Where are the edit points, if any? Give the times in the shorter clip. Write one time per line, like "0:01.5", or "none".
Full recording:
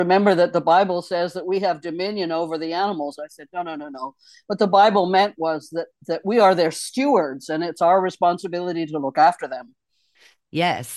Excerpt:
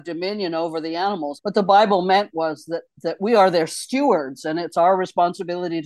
0:01.4